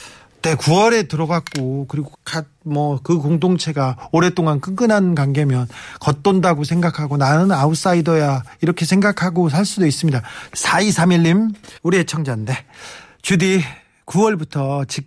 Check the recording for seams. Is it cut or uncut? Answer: cut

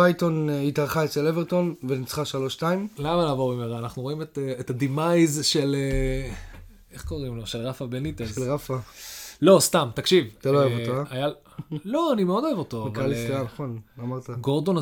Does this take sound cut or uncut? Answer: uncut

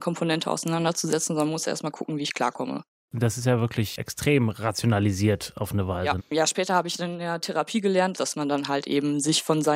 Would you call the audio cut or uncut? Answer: cut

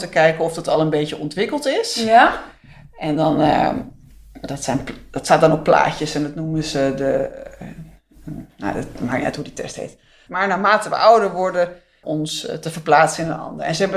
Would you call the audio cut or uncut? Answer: cut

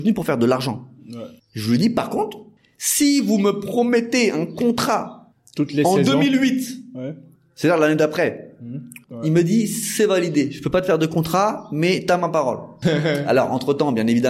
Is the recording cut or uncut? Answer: cut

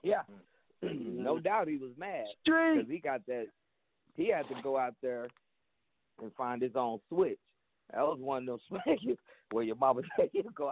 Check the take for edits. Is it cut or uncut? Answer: uncut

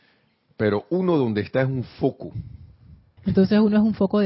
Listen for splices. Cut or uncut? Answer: cut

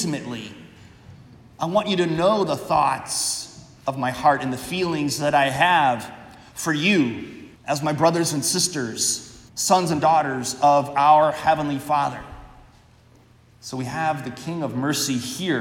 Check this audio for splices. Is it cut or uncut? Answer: cut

